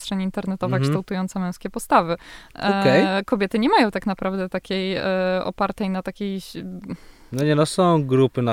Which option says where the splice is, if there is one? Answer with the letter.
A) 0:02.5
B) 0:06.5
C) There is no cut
C